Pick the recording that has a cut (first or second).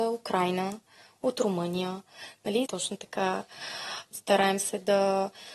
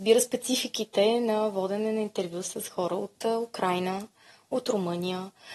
first